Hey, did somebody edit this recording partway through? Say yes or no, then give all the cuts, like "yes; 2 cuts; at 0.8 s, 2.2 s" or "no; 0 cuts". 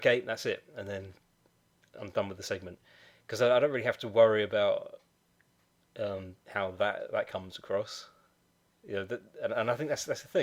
no; 0 cuts